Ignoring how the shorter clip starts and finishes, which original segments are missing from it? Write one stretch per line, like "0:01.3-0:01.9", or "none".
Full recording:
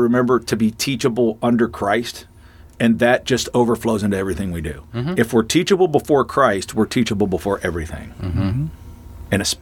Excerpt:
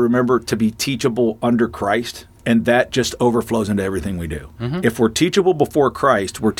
0:02.3-0:02.7